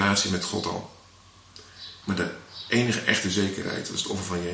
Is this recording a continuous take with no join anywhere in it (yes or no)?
no